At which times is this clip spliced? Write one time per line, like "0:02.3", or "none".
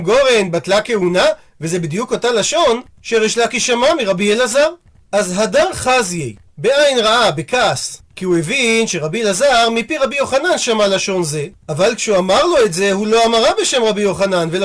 0:06.4